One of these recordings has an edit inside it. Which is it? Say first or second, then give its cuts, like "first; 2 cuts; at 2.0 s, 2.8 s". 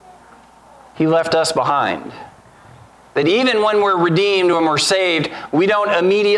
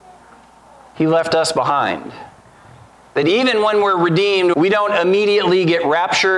second; 1 cut; at 4.5 s